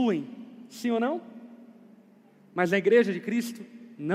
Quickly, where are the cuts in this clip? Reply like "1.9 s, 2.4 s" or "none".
none